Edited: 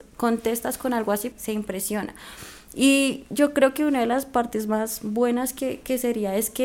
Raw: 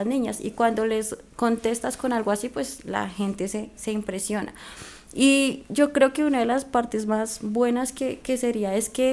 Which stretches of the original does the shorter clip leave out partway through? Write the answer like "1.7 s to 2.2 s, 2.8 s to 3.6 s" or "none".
2.5 s to 3.7 s